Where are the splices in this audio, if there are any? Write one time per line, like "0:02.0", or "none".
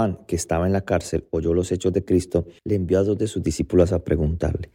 0:02.6